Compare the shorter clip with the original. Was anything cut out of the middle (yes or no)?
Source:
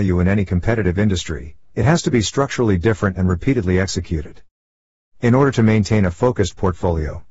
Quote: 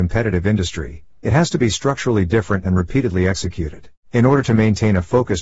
yes